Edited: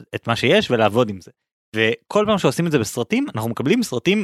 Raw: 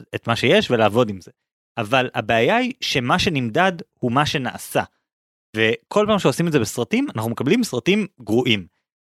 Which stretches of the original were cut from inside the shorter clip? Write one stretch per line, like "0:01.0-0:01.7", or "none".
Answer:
0:01.6-0:05.4